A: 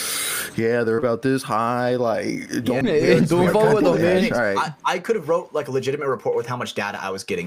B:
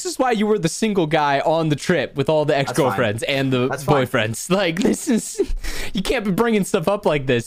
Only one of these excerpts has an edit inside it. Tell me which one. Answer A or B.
A